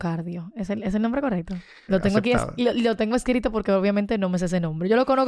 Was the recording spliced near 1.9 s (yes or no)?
yes